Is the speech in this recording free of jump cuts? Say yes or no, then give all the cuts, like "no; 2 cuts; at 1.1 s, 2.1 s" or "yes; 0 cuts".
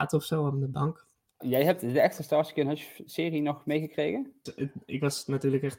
no; 2 cuts; at 1.4 s, 4.5 s